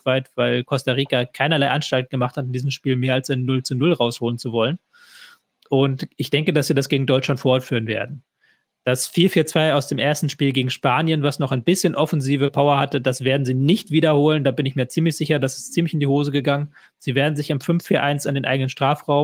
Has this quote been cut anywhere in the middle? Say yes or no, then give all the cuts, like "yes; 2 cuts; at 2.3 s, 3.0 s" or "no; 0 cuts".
no; 0 cuts